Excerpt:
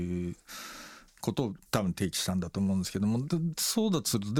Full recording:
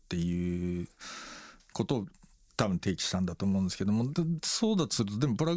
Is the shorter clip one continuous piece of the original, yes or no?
no